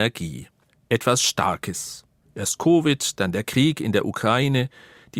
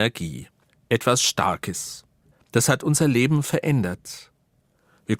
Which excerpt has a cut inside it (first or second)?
second